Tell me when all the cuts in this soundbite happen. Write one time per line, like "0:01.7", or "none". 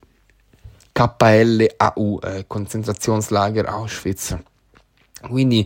none